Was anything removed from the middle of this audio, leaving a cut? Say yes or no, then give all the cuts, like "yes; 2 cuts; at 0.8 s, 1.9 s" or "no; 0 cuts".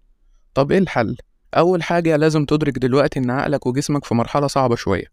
yes; 1 cut; at 1.4 s